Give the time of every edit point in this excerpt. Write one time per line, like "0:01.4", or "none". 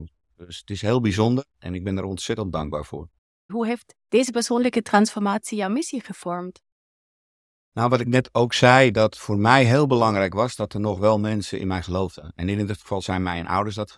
0:03.5